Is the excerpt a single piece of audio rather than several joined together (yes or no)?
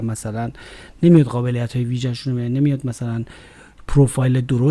yes